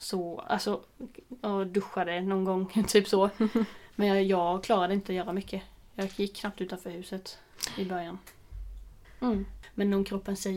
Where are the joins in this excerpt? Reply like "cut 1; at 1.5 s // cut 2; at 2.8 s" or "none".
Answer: cut 1; at 9.0 s